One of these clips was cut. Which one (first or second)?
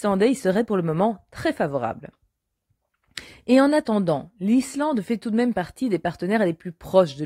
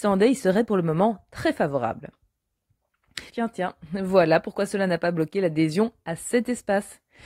second